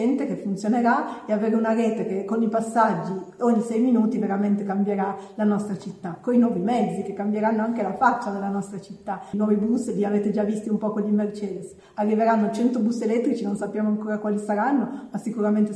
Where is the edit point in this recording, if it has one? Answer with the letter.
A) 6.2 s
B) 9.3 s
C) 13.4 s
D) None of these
B